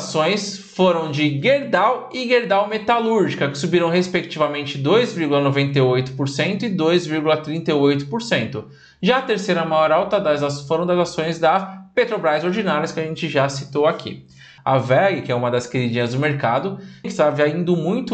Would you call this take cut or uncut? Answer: cut